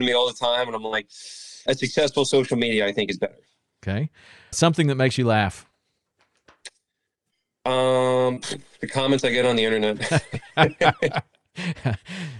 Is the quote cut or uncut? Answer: cut